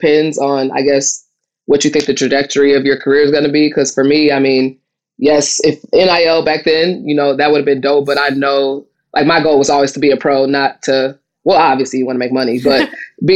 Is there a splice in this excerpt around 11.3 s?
no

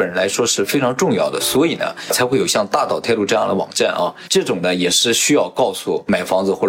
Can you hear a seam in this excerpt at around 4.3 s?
yes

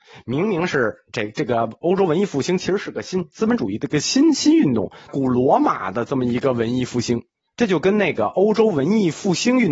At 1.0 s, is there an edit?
no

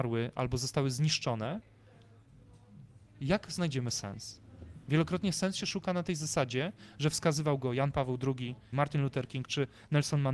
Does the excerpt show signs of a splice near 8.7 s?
yes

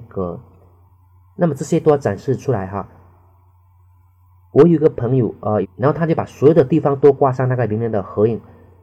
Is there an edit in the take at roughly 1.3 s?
no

